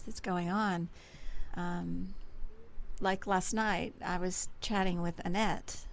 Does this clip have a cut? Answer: yes; 1 cut; at 1.5 s

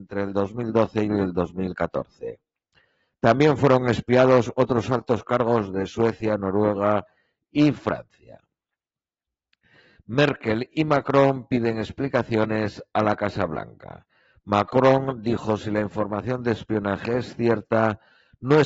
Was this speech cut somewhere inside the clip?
no; 0 cuts

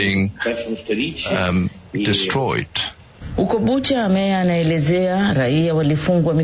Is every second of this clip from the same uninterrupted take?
yes; 0 cuts

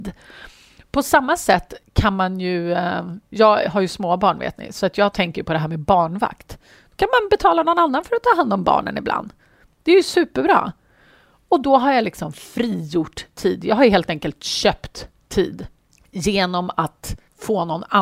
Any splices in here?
no; 0 cuts

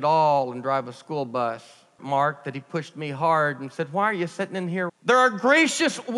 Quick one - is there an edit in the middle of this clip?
yes; 2 cuts; at 2.0 s, 4.9 s

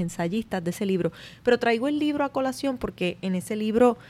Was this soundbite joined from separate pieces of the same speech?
no; 0 cuts

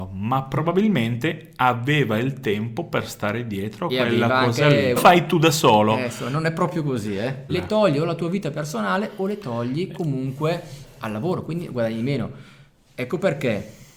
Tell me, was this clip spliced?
yes; 2 cuts; at 5.0 s, 7.5 s

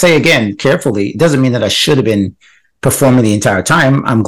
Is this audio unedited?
yes; 0 cuts

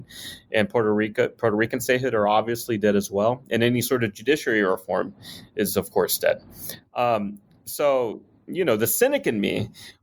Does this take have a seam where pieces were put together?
no; 0 cuts

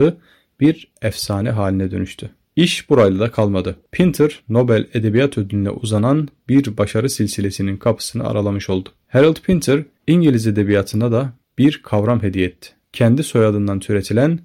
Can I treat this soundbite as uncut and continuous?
yes; 0 cuts

